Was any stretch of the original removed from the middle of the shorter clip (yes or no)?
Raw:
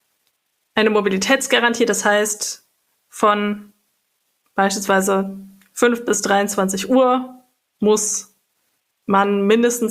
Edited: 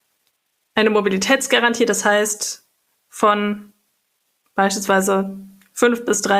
no